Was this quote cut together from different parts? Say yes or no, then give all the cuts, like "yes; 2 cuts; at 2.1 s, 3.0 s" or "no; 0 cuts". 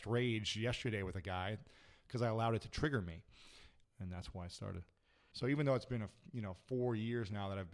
yes; 2 cuts; at 3.8 s, 5.3 s